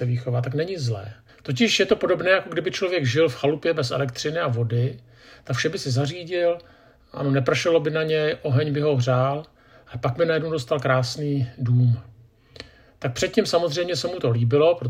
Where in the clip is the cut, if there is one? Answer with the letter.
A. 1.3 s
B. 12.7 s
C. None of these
A